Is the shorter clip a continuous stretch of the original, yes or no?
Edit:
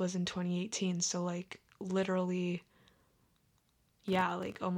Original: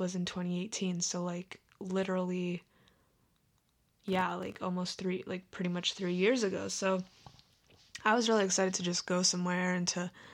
yes